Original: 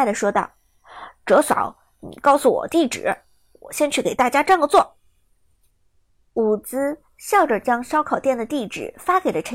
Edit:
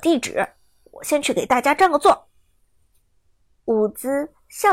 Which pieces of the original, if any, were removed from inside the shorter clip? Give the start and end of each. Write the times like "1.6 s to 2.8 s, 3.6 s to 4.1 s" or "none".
none

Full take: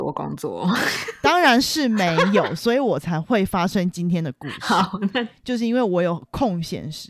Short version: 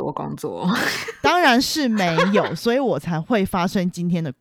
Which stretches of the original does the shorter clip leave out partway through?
none

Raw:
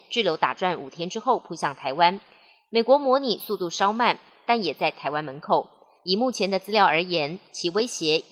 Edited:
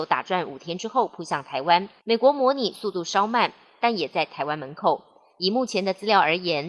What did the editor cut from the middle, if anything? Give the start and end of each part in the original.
2.3 s to 2.6 s

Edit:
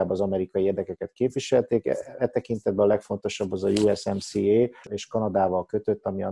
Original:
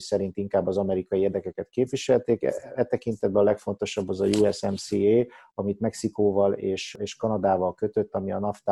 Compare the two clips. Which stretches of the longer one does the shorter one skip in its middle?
5.4 s to 6.9 s

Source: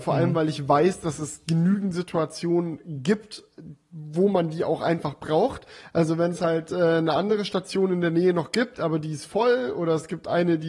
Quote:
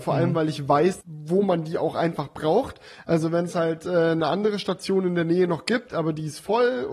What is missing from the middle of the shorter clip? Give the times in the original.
1.0 s to 3.9 s

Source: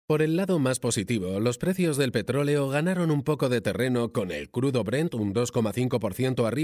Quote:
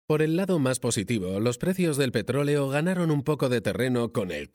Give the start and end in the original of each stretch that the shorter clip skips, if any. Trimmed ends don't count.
none

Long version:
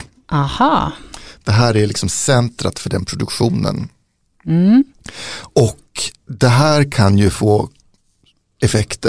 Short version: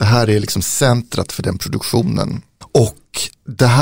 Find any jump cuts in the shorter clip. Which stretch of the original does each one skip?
4.1 s to 5.4 s

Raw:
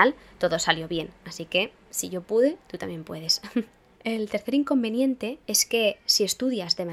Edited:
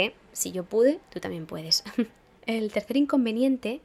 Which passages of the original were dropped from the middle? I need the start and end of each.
none

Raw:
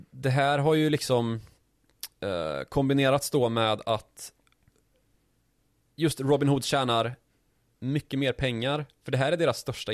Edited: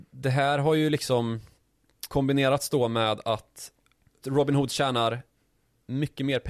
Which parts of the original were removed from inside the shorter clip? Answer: 2.1 s to 2.7 s, 4.8 s to 6.1 s

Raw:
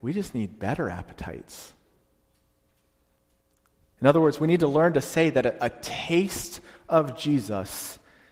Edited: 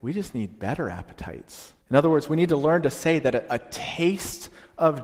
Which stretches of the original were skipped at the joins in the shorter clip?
1.8 s to 3.9 s

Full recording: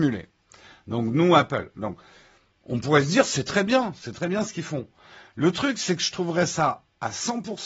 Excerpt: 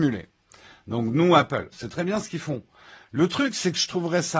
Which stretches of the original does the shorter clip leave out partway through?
1.7 s to 4.0 s

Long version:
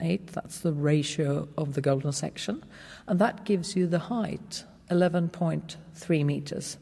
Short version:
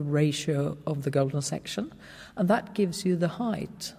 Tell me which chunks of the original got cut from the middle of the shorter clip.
none

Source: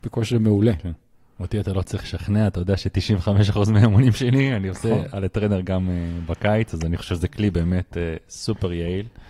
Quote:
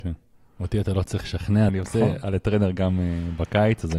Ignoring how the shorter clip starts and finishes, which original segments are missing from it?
2.5 s to 4.6 s

